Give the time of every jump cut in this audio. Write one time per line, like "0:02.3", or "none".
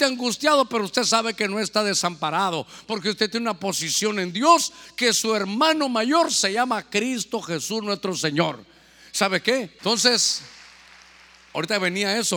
0:09.8